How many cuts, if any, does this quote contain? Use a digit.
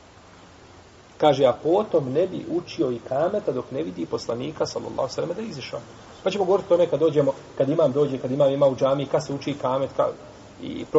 0